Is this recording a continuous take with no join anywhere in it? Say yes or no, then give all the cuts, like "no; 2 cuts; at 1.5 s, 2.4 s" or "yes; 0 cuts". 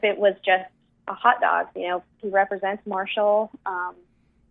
no; 1 cut; at 2.2 s